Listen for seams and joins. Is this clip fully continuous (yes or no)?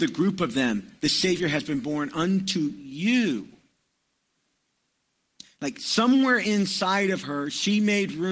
no